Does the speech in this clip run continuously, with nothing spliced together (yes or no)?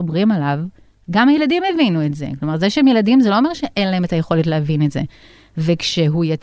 yes